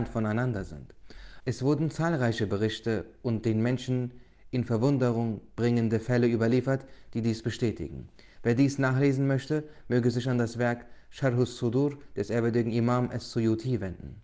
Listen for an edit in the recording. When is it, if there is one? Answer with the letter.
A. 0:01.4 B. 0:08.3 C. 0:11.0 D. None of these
A